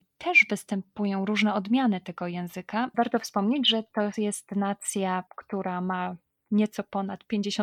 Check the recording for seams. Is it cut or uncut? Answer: cut